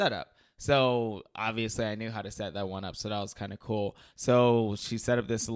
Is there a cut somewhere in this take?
yes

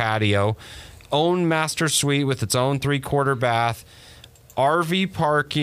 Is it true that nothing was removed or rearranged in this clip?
yes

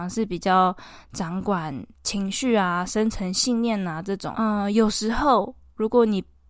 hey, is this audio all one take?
no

